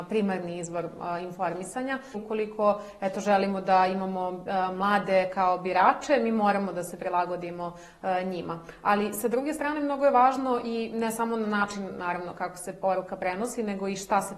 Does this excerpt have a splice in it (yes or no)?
yes